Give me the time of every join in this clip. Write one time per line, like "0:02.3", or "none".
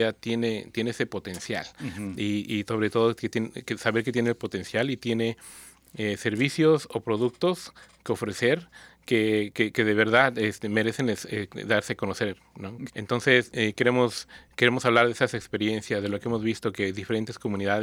0:12.9